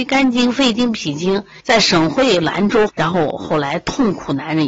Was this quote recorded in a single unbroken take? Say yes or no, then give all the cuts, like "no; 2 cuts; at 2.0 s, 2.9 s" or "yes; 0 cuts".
no; 2 cuts; at 1.6 s, 2.9 s